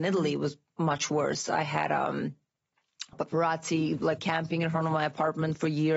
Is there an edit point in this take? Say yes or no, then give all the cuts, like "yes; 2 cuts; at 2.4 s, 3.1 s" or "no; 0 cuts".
yes; 2 cuts; at 3.1 s, 4.2 s